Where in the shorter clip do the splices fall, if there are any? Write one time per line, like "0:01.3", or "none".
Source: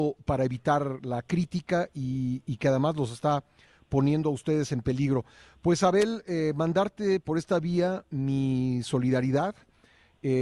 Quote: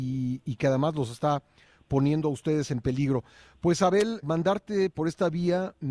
0:04.2